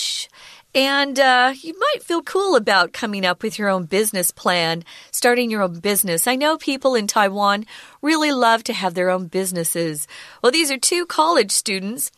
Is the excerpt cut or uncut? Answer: cut